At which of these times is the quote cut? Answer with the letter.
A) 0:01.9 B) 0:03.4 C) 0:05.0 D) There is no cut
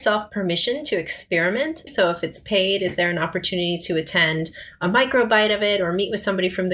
A